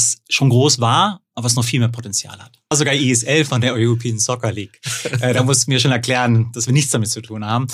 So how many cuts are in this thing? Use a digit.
1